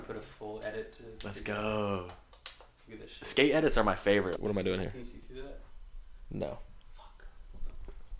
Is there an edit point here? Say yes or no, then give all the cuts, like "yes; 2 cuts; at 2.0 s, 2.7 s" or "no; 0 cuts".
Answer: yes; 1 cut; at 4.4 s